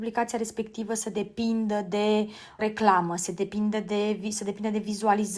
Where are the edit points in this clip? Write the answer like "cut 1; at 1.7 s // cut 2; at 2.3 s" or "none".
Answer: cut 1; at 2.6 s